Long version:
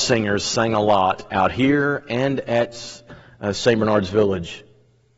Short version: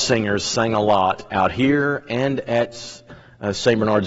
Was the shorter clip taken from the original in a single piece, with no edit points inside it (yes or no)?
yes